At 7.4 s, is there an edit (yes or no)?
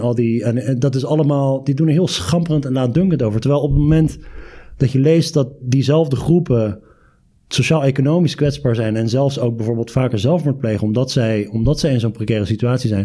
no